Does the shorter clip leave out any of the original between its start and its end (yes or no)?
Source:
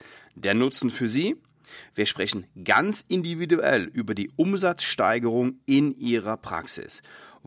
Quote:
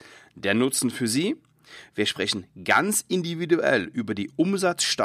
no